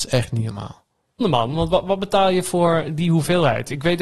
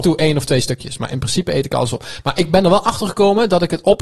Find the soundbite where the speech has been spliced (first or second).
first